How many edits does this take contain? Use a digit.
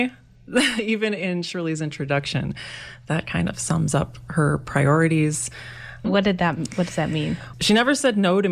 2